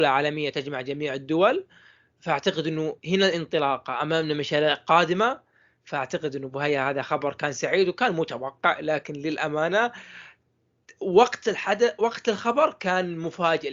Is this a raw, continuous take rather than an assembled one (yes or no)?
no